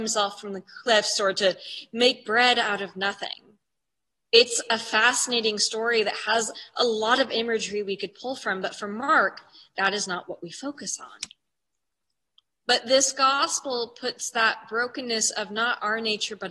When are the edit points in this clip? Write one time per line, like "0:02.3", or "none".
0:12.5

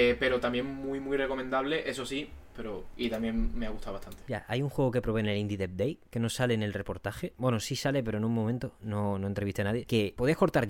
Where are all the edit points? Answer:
0:02.5
0:04.3
0:07.4

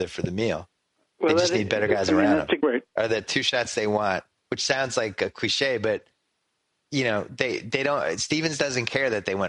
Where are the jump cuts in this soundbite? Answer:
0:02.6

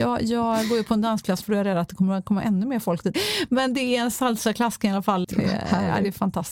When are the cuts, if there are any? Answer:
0:01.4
0:03.1
0:05.2

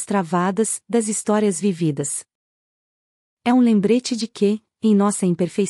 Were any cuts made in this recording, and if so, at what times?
none

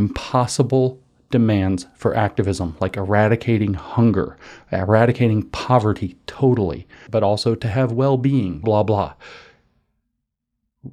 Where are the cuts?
0:07.1
0:08.6

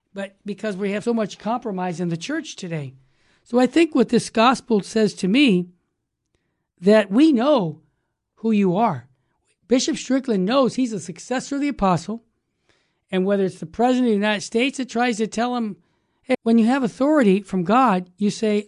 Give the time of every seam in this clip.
0:01.1
0:16.3

